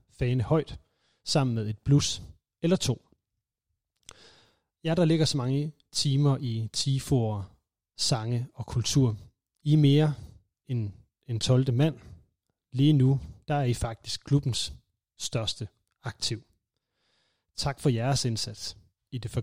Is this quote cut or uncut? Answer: cut